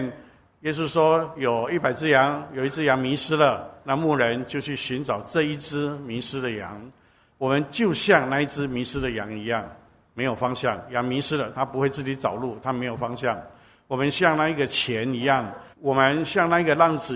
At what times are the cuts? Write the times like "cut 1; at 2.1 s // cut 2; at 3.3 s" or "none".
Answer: cut 1; at 15.7 s